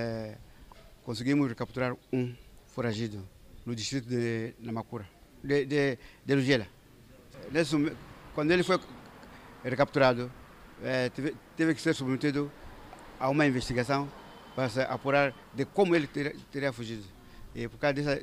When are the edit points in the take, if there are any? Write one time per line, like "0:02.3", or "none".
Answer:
0:03.6